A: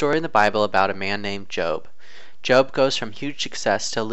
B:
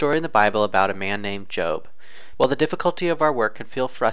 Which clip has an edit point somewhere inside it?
B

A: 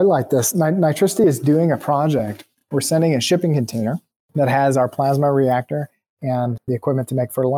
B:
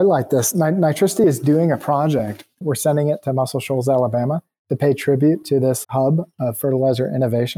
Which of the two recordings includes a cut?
B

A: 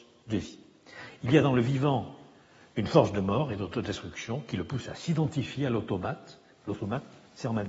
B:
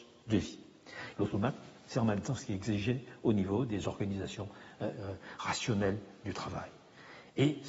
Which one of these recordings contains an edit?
B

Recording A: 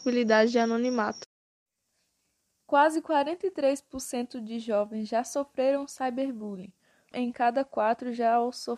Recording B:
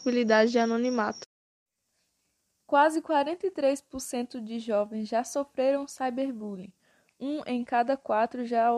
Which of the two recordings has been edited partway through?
A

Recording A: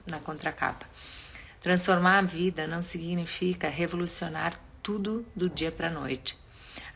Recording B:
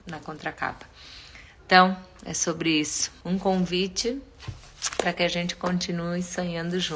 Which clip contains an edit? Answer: B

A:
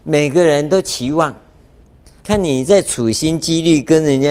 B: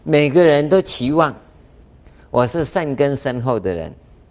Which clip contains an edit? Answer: A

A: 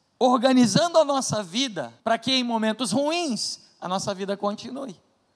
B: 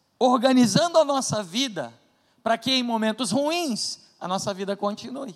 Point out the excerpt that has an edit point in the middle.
A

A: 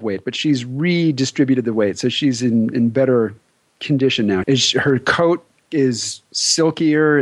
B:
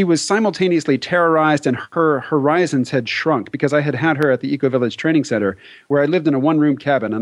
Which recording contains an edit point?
A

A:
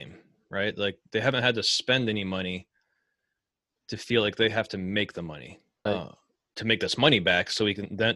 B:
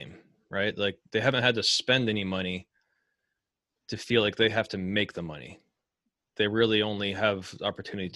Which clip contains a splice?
A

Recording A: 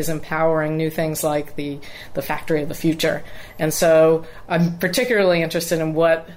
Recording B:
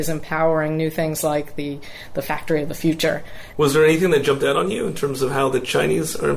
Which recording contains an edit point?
B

